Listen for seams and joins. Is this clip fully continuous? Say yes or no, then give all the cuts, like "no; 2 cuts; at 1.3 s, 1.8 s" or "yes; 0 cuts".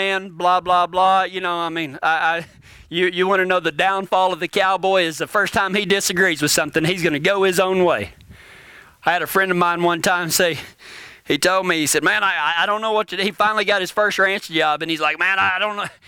yes; 0 cuts